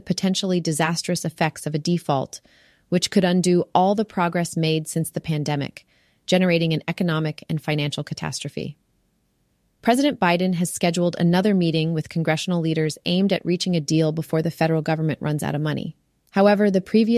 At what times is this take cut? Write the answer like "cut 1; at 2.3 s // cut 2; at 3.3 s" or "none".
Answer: none